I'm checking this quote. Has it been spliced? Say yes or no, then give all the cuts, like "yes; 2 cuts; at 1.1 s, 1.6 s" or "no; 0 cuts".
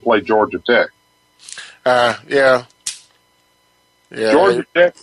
no; 0 cuts